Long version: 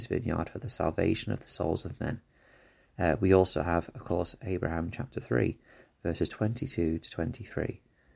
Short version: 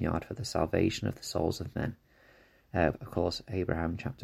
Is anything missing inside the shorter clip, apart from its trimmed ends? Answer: yes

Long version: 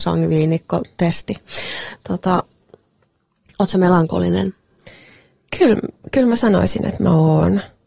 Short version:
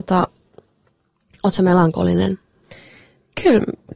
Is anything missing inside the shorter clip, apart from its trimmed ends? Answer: no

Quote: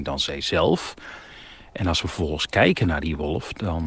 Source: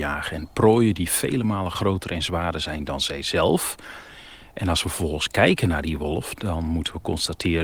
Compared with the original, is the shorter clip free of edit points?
yes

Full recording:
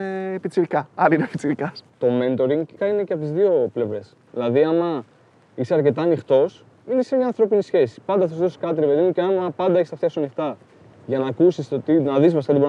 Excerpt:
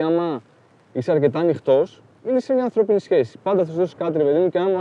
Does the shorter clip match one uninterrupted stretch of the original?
yes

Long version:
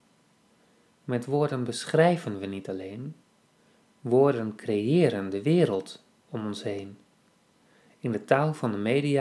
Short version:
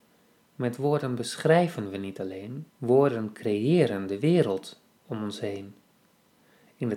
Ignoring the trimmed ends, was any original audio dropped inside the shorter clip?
yes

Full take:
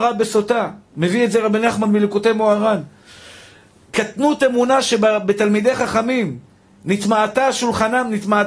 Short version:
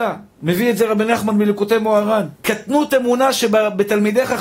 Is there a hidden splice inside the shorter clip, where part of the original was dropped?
yes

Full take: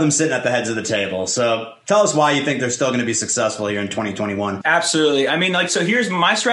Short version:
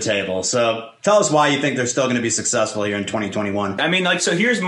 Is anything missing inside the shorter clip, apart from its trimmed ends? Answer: yes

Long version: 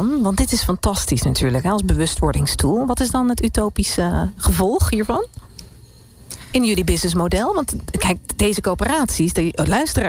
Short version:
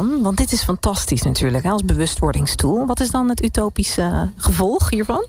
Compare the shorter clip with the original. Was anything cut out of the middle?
no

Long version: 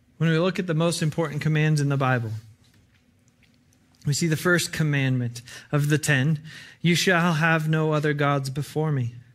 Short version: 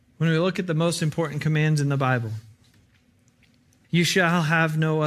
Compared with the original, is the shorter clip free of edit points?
no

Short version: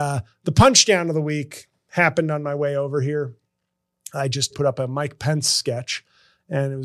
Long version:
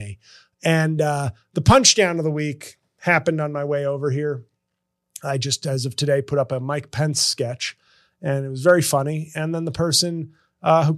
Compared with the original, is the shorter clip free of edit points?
no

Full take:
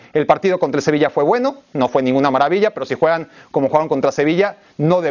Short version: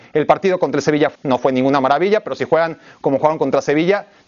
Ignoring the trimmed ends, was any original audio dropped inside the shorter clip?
yes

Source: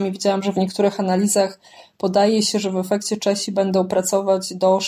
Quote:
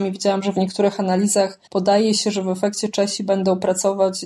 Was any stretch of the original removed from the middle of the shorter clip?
yes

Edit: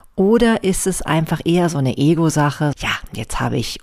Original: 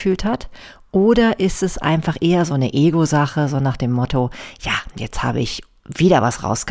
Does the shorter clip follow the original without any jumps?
no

